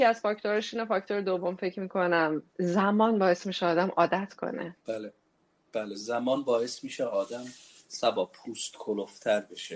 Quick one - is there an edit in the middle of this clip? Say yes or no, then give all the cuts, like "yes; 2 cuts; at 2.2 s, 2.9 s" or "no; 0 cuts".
yes; 2 cuts; at 2.5 s, 4.8 s